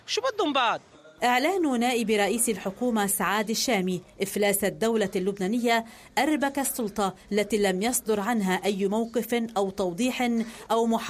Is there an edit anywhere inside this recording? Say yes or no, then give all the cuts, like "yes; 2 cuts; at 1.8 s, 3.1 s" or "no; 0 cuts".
no; 0 cuts